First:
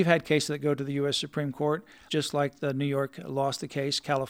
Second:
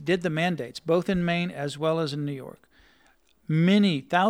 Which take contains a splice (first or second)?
first